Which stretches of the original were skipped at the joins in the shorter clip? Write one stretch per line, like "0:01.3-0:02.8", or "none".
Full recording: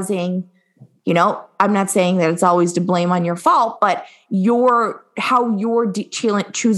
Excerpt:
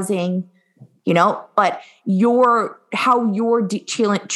0:01.6-0:03.8